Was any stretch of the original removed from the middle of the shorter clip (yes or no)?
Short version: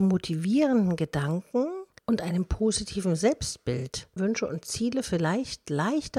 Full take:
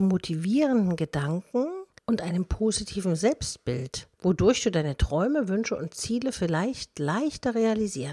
yes